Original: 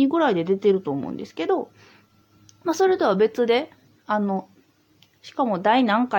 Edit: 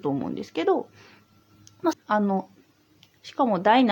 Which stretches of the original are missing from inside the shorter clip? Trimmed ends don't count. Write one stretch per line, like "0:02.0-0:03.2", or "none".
0:02.7-0:03.9